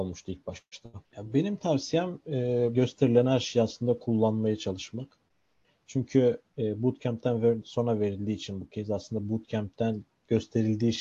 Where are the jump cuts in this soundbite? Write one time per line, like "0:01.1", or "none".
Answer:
0:02.7